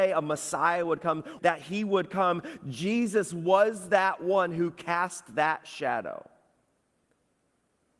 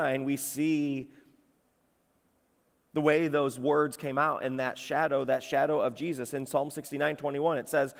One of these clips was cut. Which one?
first; 1 cut; at 1.4 s

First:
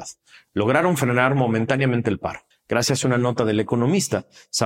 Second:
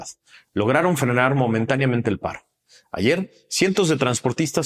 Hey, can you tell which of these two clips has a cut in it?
first; 1 cut; at 2.5 s

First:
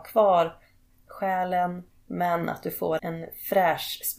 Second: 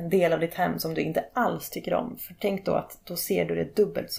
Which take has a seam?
first; 1 cut; at 3.0 s

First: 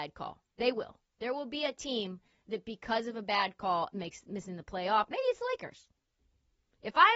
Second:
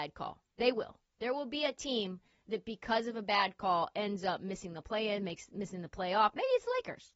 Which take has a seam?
first; 1 cut; at 3.9 s

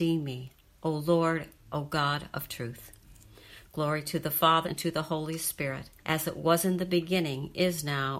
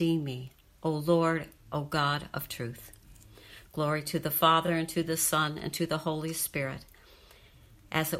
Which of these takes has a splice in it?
first; 2 cuts; at 4.6 s, 6.0 s

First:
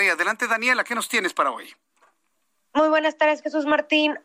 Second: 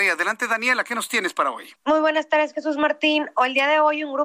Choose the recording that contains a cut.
second; 1 cut; at 1.8 s

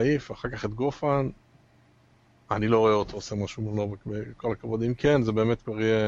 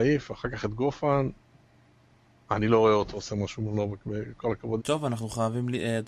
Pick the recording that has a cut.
second; 1 cut; at 4.8 s

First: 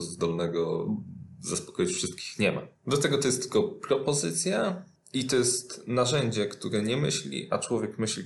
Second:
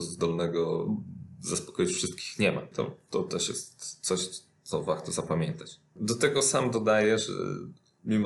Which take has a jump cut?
second; 2 cuts; at 2.7 s, 6.0 s

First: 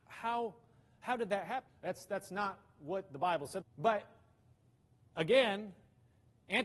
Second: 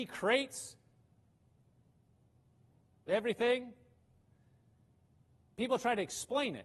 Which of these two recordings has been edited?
first; 2 cuts; at 1.7 s, 3.6 s

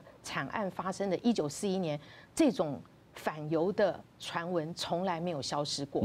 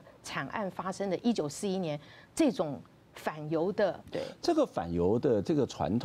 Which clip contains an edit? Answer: second; 1 cut; at 4.1 s

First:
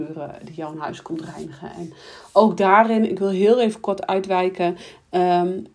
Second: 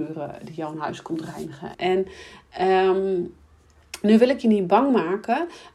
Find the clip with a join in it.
second; 1 cut; at 1.7 s

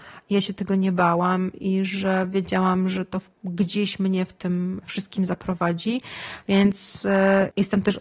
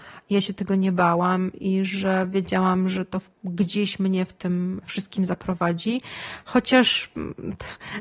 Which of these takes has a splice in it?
first; 1 cut; at 6.4 s

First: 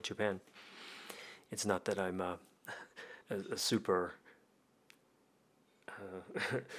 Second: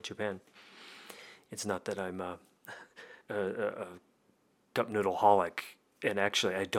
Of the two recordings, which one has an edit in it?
second; 1 cut; at 3.2 s

